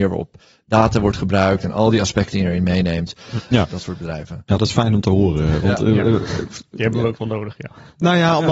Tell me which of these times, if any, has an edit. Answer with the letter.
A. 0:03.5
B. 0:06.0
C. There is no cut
A